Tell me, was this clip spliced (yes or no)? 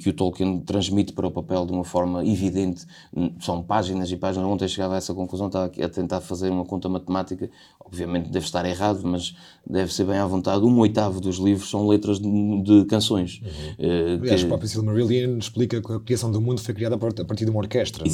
no